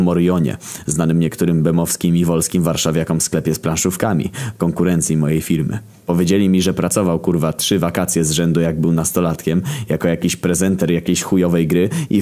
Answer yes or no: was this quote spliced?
yes